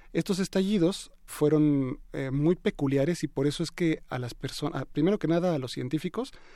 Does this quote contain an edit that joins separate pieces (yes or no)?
yes